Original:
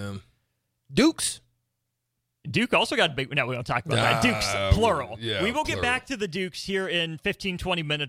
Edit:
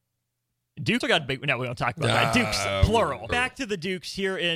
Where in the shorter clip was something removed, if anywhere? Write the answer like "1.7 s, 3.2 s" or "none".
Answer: 1.0 s, 3.3 s